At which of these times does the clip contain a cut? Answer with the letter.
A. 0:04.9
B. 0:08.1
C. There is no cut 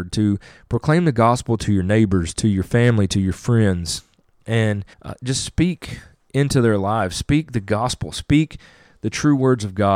A